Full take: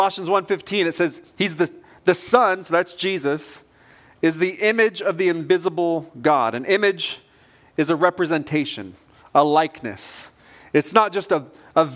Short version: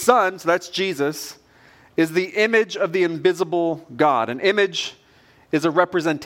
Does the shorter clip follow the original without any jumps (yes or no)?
yes